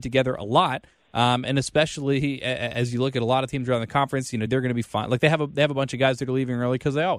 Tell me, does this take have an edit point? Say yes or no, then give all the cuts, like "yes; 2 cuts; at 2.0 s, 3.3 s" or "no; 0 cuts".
yes; 1 cut; at 4.5 s